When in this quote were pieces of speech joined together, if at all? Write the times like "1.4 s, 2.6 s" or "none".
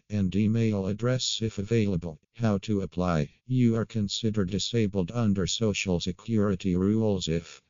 2.2 s, 3.4 s